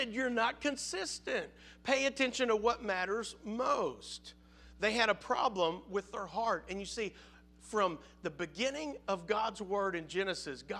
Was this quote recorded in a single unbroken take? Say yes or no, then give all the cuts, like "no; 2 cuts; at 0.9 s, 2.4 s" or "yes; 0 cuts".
yes; 0 cuts